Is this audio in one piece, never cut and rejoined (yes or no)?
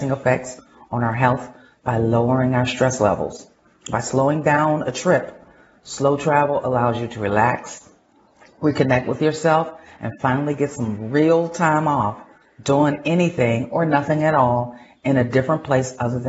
yes